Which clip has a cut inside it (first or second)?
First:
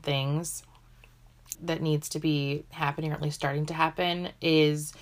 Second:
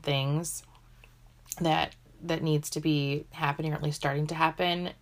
first